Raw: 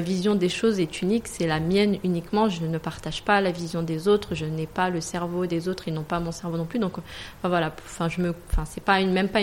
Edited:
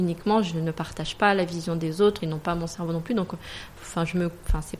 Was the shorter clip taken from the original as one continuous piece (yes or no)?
no